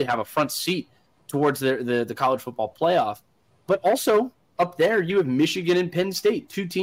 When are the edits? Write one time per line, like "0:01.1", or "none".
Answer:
none